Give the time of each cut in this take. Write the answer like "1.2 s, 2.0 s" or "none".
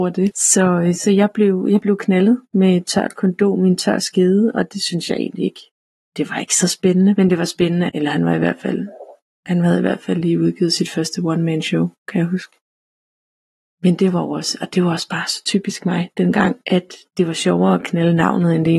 7.9 s

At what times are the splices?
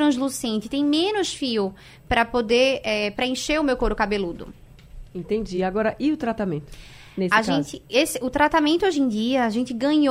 none

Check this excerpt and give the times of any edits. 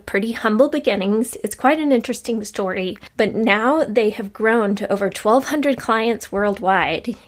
none

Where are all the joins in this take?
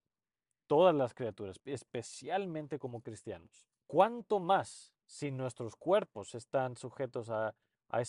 1.6 s, 3.9 s

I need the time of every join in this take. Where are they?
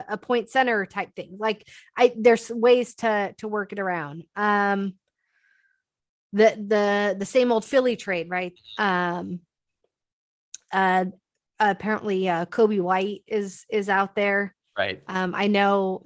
8.6 s

